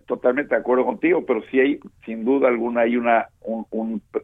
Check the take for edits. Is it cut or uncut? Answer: uncut